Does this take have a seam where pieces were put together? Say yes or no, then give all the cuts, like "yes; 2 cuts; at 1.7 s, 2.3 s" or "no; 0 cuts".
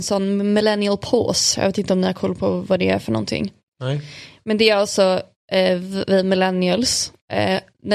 no; 0 cuts